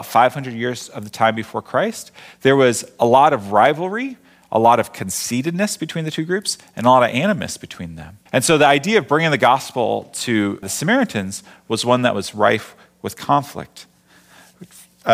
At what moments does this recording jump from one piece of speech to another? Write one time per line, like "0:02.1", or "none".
0:08.3
0:10.6